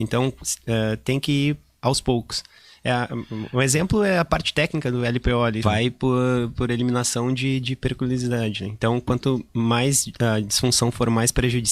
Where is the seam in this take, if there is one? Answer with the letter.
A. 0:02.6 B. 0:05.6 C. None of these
B